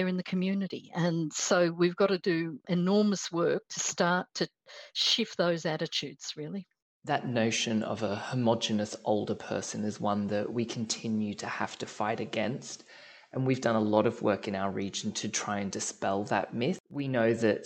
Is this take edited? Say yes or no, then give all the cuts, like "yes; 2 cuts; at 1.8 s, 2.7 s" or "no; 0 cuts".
no; 0 cuts